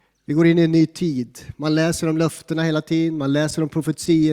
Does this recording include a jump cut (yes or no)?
no